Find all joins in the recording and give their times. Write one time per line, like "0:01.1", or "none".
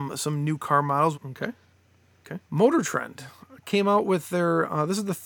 0:01.1
0:02.5